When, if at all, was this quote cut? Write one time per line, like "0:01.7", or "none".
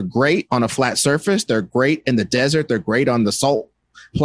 none